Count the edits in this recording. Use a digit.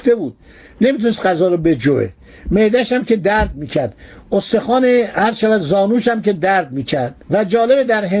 1